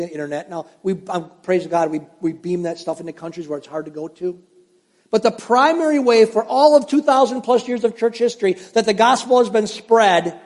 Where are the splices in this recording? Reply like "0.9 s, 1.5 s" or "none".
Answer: none

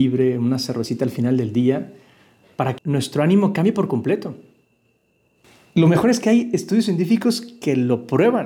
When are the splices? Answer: none

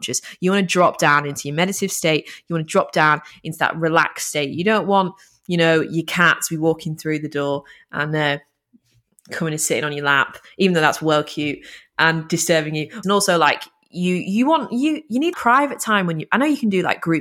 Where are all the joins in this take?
13.0 s, 15.3 s

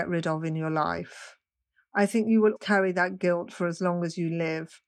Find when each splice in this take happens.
2.6 s

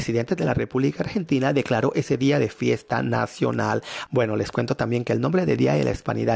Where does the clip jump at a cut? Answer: 4.0 s

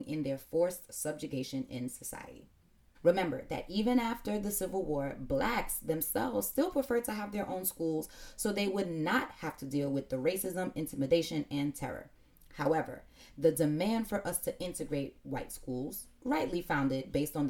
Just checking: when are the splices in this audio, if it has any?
2.9 s

